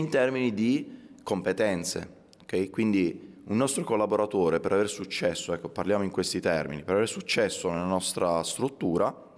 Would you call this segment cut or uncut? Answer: uncut